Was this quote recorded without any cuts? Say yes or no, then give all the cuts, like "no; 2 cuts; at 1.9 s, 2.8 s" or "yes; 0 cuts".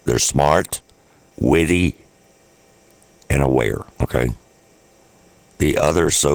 no; 2 cuts; at 1.3 s, 3.9 s